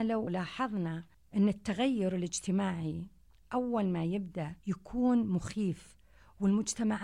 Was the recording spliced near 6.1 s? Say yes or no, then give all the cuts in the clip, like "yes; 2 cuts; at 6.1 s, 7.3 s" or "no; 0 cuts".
no; 1 cut; at 4.6 s